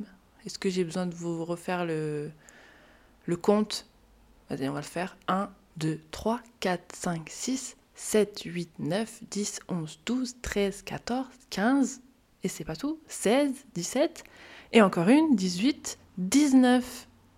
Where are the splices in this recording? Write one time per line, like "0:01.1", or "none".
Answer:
0:16.1